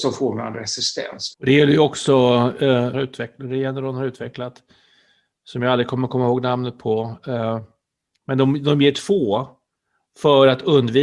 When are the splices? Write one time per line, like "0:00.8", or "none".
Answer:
0:01.3
0:02.9